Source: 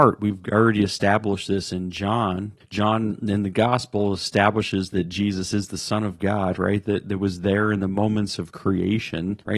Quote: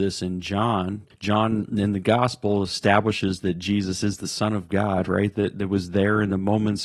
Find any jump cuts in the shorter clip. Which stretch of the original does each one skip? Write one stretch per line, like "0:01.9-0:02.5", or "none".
none